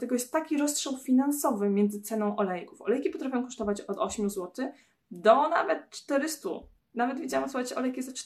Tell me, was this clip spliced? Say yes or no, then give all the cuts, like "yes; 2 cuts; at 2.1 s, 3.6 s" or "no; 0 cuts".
no; 0 cuts